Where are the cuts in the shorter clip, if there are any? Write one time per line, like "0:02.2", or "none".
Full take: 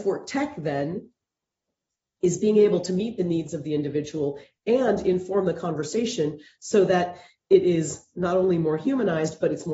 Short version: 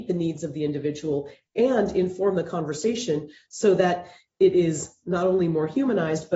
none